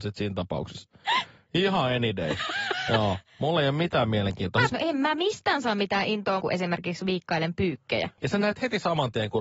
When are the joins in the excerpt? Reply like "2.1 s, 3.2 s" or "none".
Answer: 4.7 s, 6.4 s, 8.2 s